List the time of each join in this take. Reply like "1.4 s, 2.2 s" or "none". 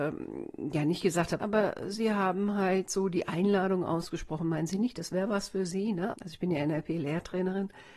1.4 s, 6.1 s